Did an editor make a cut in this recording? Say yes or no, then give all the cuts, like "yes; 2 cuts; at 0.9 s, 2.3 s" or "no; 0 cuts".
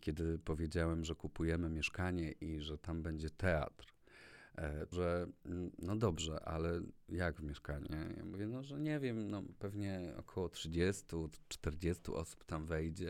yes; 2 cuts; at 4.9 s, 7.9 s